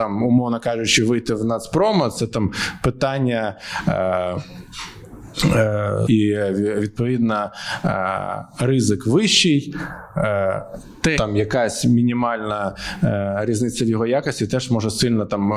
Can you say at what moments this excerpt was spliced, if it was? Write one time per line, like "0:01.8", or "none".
0:06.1
0:11.2